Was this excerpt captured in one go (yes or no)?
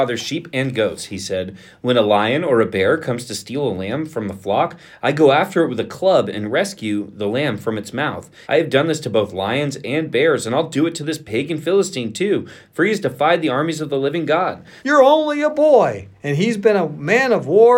no